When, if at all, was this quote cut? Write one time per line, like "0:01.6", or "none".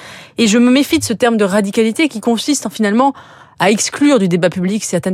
none

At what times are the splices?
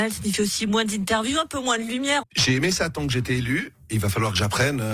0:02.2

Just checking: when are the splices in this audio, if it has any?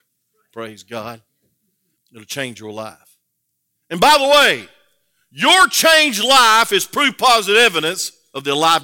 0:02.0

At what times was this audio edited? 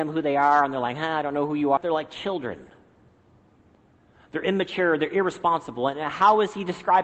0:01.8

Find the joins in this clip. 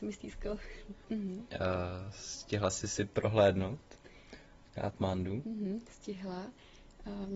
0:01.1

